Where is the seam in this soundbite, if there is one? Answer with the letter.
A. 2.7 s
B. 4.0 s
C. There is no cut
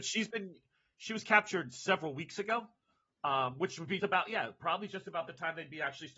B